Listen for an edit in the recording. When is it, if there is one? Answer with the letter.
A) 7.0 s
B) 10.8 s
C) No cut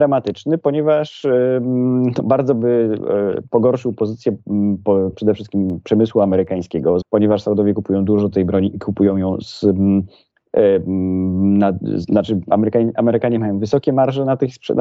A